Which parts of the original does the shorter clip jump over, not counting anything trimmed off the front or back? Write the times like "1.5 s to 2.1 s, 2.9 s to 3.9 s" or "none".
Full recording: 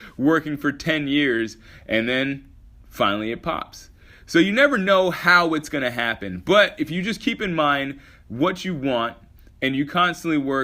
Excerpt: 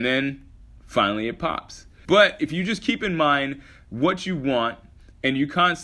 4.1 s to 6.4 s